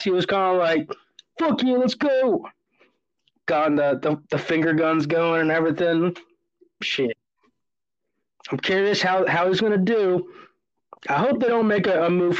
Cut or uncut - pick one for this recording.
cut